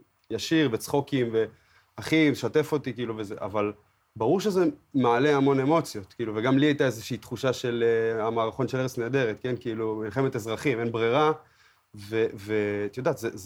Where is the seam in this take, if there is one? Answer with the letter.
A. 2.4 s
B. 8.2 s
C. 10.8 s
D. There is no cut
D